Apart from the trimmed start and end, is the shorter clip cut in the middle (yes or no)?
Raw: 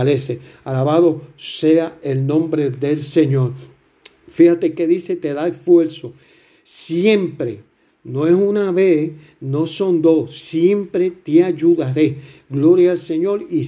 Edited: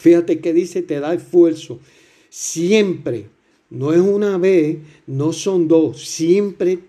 no